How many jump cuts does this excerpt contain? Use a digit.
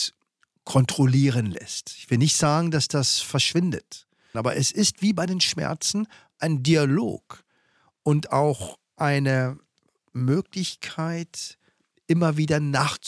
1